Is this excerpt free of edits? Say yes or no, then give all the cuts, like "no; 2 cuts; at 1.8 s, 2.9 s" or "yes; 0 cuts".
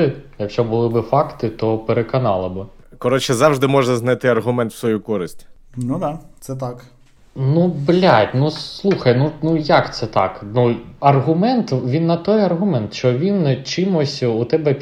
yes; 0 cuts